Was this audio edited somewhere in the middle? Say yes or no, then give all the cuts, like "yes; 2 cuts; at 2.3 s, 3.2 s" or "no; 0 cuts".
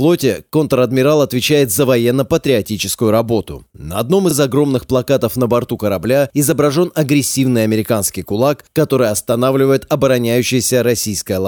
no; 0 cuts